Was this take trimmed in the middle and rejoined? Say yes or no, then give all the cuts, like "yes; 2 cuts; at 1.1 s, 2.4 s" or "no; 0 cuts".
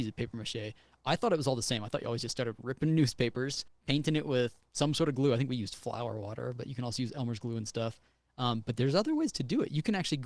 yes; 1 cut; at 3.7 s